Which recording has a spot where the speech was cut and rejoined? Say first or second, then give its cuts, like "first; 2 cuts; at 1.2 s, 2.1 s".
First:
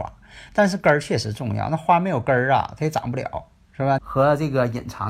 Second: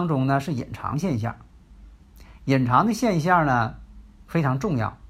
first; 1 cut; at 4.0 s